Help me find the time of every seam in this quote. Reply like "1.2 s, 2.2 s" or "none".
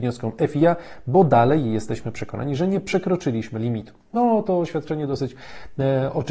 none